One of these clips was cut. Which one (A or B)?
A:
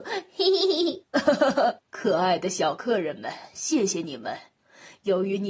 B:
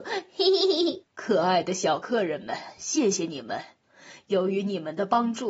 B